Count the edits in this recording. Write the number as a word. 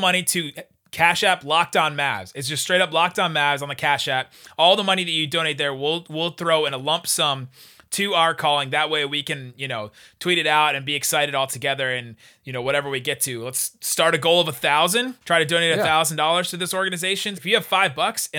two